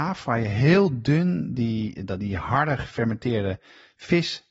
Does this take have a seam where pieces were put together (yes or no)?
no